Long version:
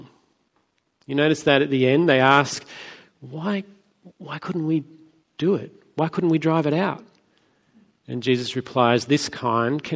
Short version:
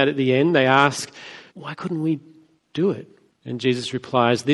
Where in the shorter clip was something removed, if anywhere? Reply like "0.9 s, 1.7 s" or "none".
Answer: 1.5 s, 3.3 s